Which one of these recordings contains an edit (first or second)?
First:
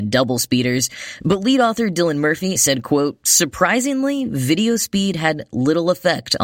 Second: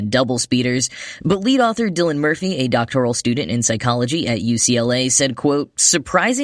first